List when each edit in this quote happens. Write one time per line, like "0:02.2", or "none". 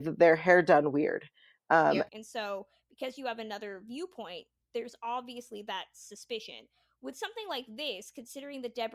0:02.1